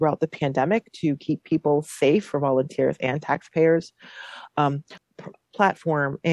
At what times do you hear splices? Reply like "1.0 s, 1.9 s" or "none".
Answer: 5.0 s